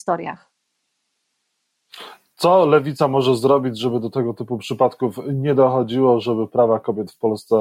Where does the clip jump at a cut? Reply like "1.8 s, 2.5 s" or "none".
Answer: none